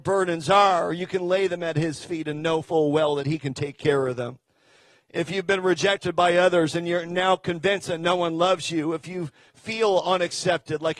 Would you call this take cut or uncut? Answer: uncut